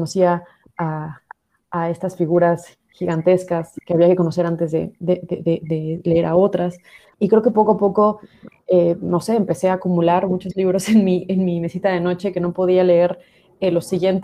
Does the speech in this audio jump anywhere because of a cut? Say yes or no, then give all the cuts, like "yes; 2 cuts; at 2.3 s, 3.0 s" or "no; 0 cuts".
yes; 1 cut; at 7.1 s